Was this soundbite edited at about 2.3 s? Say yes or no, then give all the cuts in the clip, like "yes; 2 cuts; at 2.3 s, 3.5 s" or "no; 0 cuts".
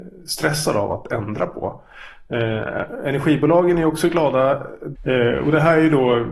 no; 1 cut; at 5.0 s